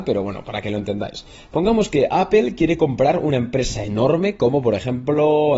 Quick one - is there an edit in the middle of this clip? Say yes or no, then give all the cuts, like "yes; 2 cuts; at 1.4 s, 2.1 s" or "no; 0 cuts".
no; 0 cuts